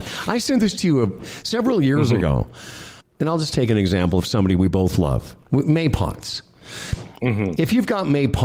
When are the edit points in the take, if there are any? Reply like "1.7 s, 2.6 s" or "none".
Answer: 3.0 s, 5.4 s

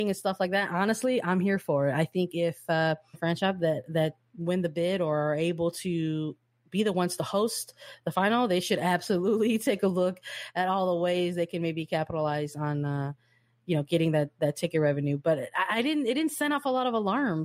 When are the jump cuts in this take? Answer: 3.1 s

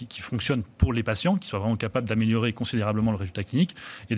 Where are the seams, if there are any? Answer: none

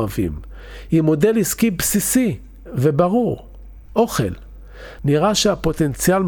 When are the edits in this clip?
5.0 s

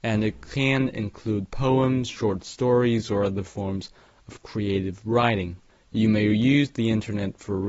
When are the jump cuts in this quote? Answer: 5.7 s

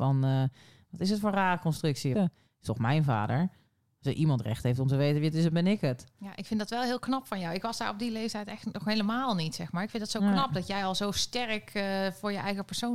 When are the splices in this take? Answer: 2.1 s

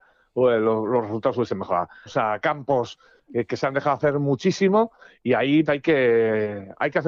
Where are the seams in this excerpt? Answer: 2.1 s, 5.7 s

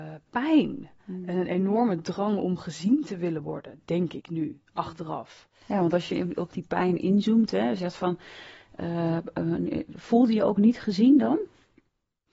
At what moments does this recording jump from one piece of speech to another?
none

